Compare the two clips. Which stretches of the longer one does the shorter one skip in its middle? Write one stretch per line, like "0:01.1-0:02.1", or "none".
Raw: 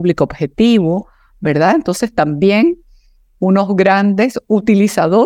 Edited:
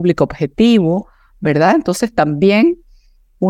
none